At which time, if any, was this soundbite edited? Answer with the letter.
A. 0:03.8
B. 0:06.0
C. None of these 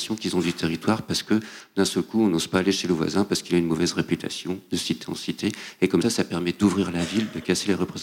B